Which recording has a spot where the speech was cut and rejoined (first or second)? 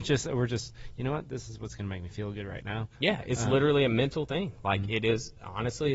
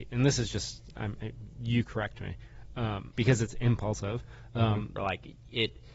second